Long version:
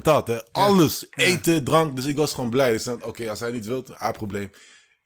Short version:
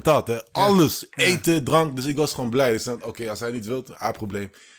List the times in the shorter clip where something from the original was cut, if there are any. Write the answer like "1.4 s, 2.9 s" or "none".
none